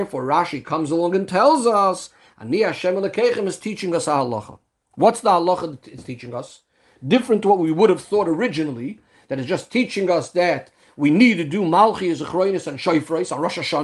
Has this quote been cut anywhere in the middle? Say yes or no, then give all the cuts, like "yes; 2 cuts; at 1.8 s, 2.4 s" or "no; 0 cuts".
no; 0 cuts